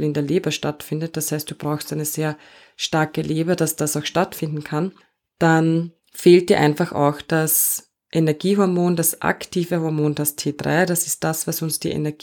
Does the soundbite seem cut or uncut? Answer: uncut